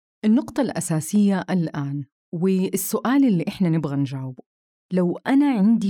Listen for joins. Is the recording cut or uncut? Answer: uncut